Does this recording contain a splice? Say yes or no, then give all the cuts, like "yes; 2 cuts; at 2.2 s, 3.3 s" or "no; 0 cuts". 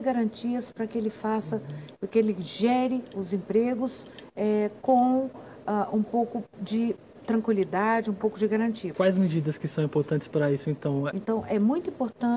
yes; 2 cuts; at 8.9 s, 11.1 s